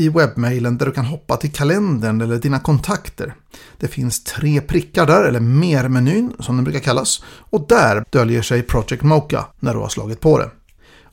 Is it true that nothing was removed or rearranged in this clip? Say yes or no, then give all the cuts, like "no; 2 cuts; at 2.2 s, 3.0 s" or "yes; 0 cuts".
no; 2 cuts; at 8.0 s, 9.5 s